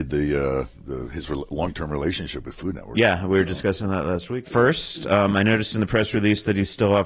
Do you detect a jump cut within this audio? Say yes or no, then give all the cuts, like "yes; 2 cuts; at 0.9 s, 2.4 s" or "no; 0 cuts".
yes; 1 cut; at 4.4 s